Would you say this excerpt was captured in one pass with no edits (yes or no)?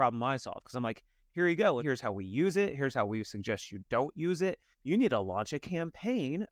no